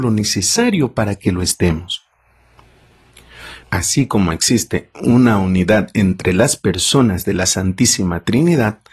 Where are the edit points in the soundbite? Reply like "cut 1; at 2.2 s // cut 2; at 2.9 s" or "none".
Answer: cut 1; at 3.6 s